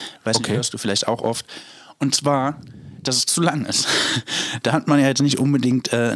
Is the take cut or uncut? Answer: uncut